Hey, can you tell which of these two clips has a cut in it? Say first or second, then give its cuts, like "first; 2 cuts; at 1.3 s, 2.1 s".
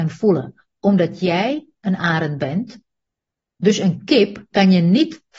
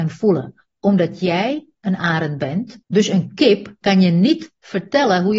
second; 1 cut; at 2.8 s